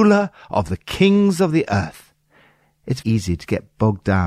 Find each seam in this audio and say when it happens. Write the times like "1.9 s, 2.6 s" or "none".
3.0 s